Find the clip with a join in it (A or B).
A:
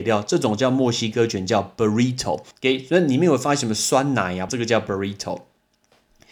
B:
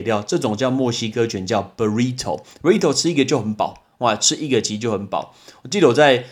A